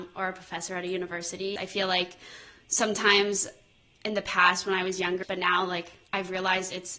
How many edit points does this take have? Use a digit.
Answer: 2